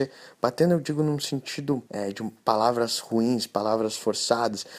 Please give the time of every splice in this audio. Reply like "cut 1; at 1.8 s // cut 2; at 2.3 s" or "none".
cut 1; at 1.9 s